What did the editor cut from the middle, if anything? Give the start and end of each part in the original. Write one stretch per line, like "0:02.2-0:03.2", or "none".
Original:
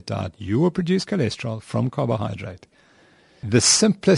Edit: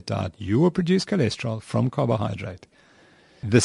none